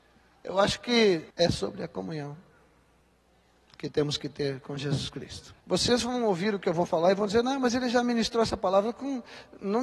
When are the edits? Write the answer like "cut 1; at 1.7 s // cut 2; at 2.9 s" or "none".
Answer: cut 1; at 1.3 s // cut 2; at 5.6 s